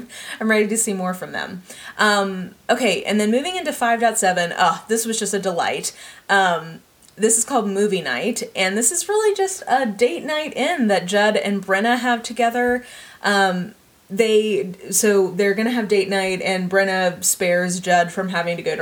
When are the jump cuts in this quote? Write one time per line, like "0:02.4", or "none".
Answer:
none

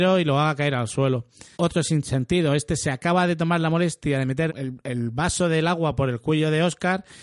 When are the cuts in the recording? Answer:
0:01.5
0:04.5

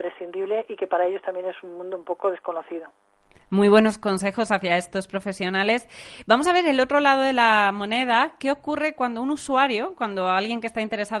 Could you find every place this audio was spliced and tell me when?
none

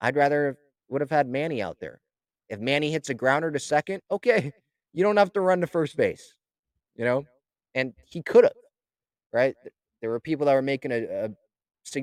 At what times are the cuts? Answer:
none

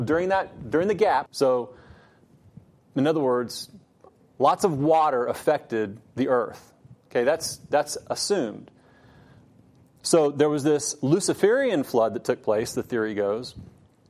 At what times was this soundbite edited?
0:01.3

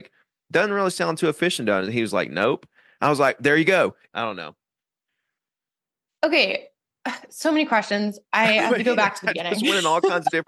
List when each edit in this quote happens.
0:04.1

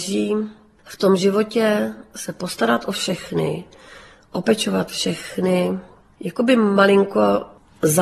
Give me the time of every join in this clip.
0:06.1

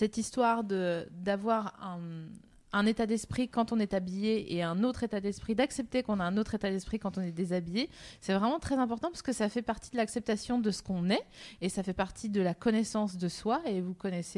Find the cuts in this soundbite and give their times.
none

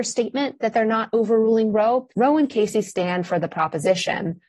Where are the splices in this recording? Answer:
0:02.1

